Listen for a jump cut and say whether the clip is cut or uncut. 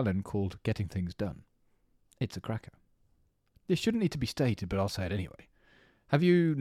cut